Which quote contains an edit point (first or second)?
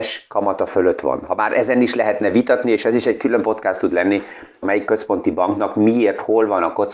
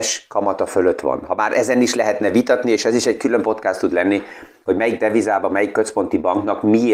first